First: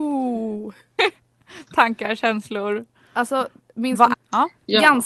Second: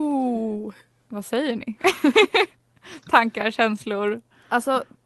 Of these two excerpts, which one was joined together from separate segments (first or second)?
first